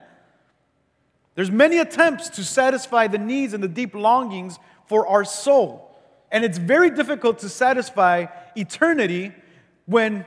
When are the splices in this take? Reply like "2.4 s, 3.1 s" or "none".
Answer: 6.3 s